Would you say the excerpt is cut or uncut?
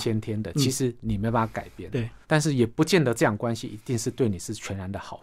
cut